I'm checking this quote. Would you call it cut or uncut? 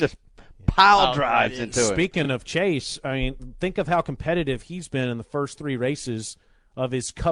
uncut